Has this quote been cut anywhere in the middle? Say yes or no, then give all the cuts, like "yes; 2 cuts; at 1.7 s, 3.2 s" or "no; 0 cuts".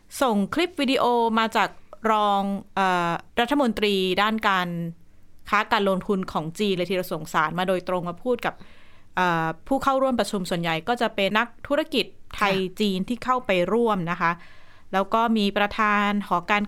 yes; 2 cuts; at 3.3 s, 11.3 s